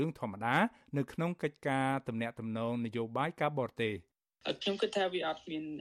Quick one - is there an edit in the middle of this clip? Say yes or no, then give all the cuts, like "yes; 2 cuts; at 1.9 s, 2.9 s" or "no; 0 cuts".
no; 0 cuts